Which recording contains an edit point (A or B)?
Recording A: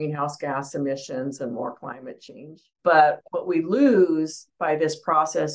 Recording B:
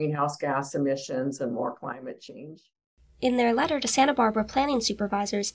A